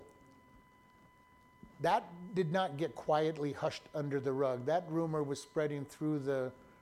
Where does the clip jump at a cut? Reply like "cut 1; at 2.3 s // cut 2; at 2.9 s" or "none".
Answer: none